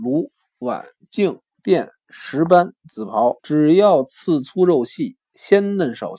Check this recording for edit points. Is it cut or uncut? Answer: cut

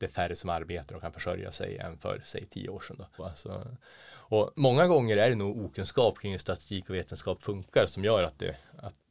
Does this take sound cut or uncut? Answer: cut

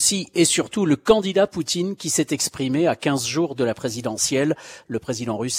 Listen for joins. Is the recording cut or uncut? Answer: uncut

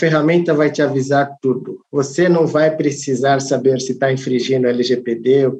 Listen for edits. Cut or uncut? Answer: cut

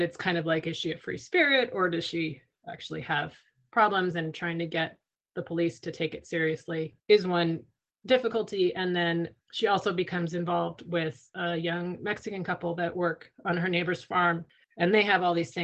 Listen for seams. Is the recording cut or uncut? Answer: uncut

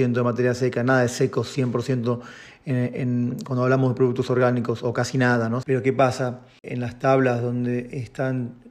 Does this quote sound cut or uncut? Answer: cut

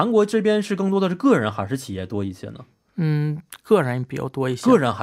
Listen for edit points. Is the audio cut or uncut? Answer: uncut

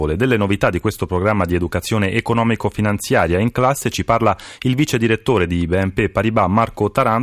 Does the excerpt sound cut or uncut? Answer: uncut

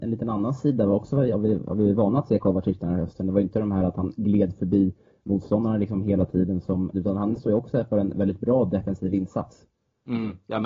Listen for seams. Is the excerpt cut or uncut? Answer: cut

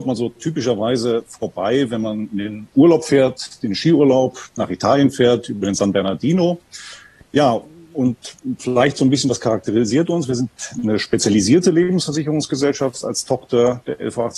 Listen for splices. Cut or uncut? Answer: uncut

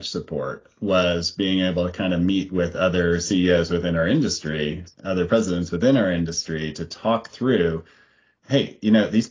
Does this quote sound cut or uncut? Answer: uncut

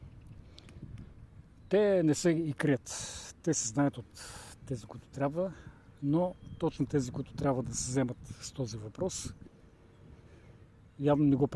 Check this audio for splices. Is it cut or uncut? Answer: uncut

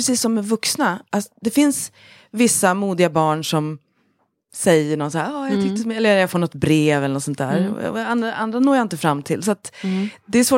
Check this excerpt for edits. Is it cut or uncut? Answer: uncut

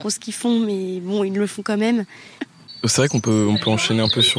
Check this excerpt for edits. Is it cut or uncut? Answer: cut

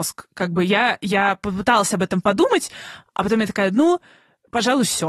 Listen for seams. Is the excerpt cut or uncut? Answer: uncut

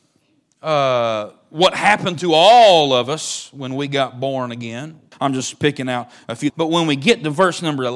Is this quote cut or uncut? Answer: cut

